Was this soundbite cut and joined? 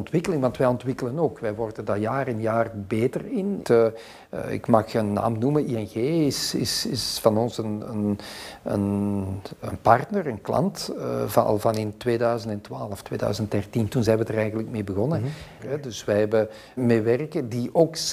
yes; 3 cuts; at 3.6 s, 15.6 s, 16.8 s

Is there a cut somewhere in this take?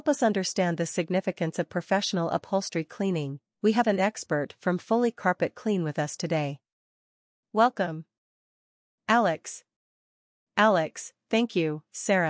no; 0 cuts

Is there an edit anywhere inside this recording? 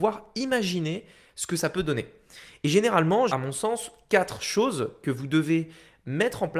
yes; 1 cut; at 3.3 s

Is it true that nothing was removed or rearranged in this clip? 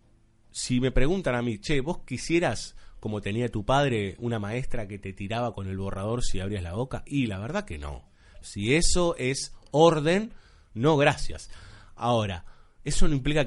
no; 1 cut; at 8.4 s

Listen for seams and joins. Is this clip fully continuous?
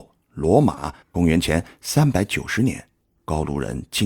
no; 1 cut; at 1.0 s

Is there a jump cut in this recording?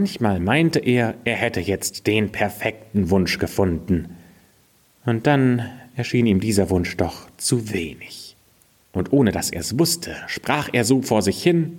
yes; 1 cut; at 8.9 s

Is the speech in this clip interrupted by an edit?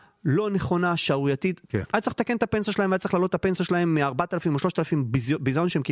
yes; 1 cut; at 1.6 s

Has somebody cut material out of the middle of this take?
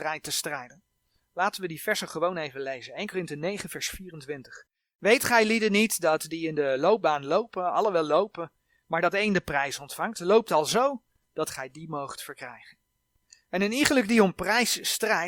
no; 0 cuts

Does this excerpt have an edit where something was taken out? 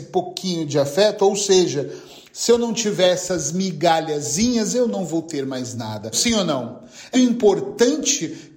yes; 2 cuts; at 6.1 s, 7.1 s

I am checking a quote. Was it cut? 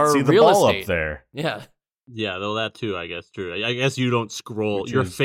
no; 0 cuts

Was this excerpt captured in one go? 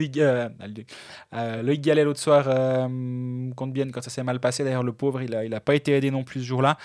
yes; 0 cuts

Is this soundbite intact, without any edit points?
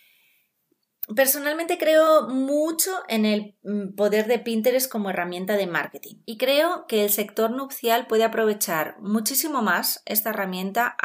yes; 0 cuts

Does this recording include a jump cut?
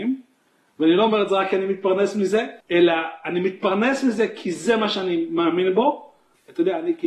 yes; 1 cut; at 2.6 s

